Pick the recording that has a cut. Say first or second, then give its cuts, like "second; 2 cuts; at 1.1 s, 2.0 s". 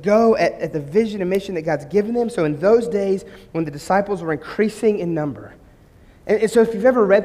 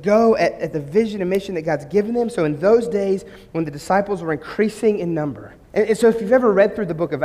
second; 1 cut; at 5.6 s